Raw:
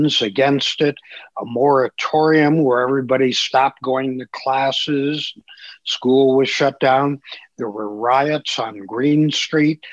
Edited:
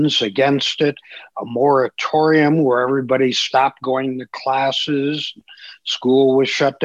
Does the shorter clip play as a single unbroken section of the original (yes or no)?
yes